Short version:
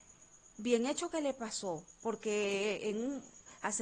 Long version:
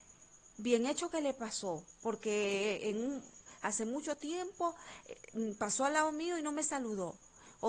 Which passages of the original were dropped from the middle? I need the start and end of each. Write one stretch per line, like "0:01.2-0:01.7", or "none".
none